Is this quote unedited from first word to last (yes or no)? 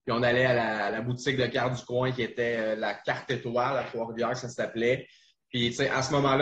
yes